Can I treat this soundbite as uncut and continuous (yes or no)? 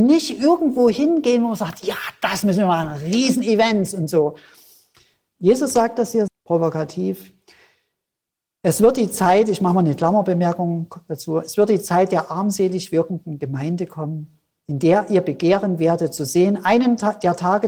no